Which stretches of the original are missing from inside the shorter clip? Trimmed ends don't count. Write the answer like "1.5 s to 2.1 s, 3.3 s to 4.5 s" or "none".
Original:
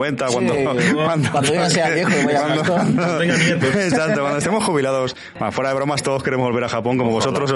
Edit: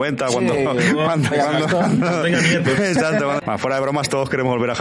1.3 s to 2.3 s, 4.3 s to 5.3 s